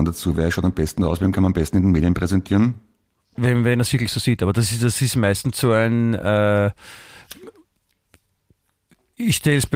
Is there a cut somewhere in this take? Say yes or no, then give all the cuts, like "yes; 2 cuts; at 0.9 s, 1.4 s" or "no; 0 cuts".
yes; 1 cut; at 3.2 s